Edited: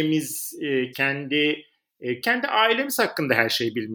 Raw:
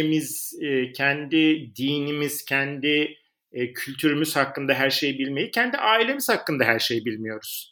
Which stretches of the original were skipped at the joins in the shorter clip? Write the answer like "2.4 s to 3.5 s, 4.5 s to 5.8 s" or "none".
0.9 s to 2.4 s, 3.7 s to 5.5 s